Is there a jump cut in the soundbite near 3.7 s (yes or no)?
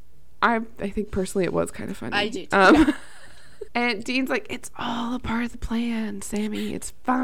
yes